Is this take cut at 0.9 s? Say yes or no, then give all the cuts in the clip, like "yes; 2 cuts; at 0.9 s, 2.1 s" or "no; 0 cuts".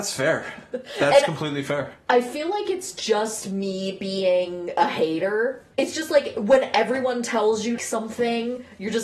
no; 2 cuts; at 5.7 s, 7.8 s